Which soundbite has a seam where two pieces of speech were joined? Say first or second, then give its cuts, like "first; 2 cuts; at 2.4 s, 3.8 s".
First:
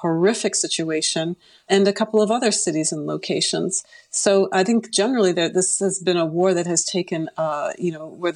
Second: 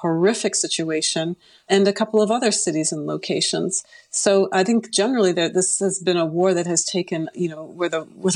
second; 1 cut; at 7.3 s